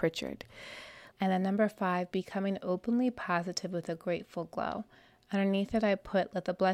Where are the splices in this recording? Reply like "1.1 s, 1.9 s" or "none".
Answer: 1.1 s